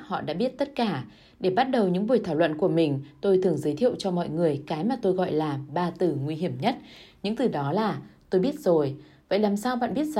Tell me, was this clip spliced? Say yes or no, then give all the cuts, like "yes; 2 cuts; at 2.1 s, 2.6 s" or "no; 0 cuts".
no; 0 cuts